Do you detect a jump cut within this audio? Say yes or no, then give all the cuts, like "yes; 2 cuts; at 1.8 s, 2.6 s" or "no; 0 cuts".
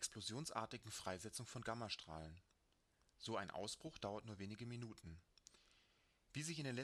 no; 0 cuts